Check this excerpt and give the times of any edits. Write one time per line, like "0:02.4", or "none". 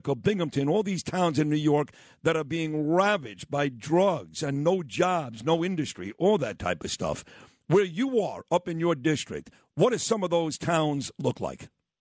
none